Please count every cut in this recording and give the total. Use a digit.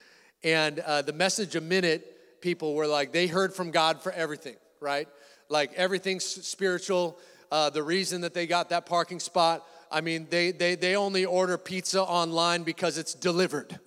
0